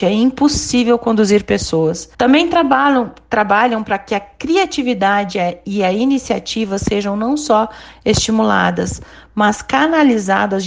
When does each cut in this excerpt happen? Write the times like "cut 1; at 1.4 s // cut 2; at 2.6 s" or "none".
cut 1; at 2.1 s